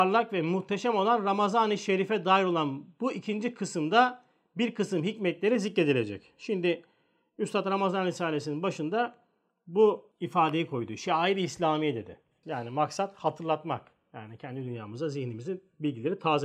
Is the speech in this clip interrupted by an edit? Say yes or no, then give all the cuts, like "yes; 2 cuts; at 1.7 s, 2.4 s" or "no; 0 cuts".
yes; 1 cut; at 12.4 s